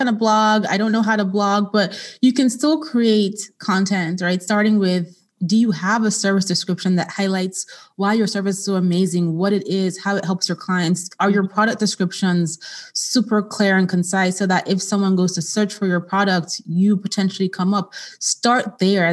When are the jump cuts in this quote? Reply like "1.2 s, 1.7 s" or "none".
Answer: none